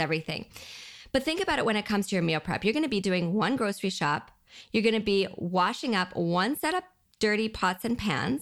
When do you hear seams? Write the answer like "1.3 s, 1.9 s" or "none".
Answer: none